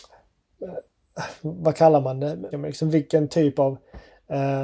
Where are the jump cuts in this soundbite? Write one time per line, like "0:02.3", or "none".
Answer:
0:02.5